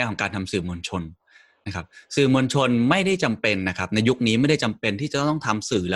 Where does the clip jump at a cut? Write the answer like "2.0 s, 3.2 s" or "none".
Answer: none